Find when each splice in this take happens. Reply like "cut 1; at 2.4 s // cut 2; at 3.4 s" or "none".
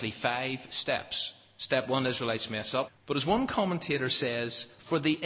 cut 1; at 2.9 s